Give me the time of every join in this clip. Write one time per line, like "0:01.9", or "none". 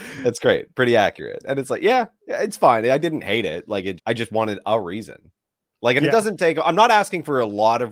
0:04.0